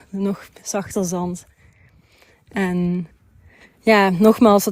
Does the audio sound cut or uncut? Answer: uncut